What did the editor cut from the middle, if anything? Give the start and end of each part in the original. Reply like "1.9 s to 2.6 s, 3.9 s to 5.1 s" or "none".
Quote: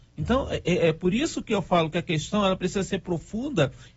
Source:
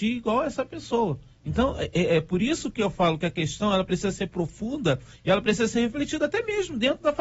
none